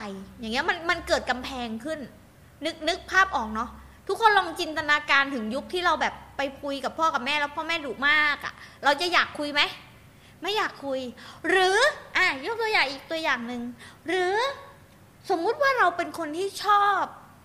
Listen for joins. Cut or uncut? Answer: uncut